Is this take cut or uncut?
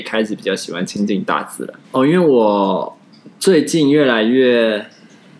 cut